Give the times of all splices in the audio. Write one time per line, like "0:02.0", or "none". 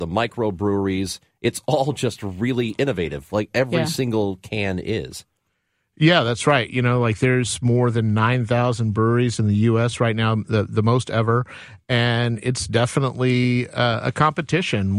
none